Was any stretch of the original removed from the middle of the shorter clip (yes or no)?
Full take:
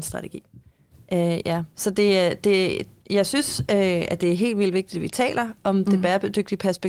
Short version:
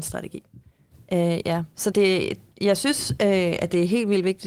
yes